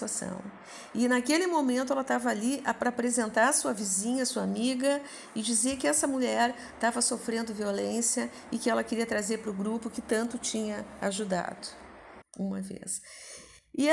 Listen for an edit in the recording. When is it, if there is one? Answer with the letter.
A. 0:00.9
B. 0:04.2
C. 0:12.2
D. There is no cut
C